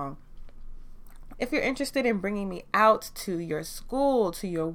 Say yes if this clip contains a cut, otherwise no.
yes